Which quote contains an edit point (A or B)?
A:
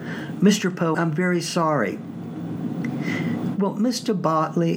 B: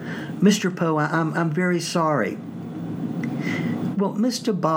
A